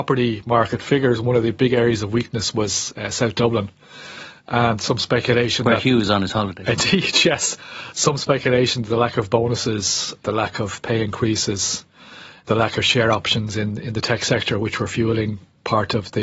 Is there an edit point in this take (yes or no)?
no